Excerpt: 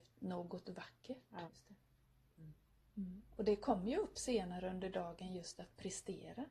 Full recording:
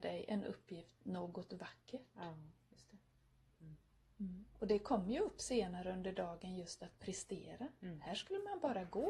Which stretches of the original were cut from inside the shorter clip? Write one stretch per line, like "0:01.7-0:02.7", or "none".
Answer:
0:02.3-0:02.7